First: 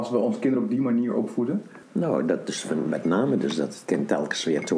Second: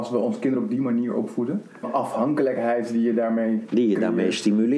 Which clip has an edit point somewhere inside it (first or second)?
second